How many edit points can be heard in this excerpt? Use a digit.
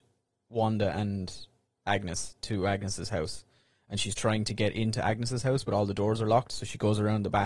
0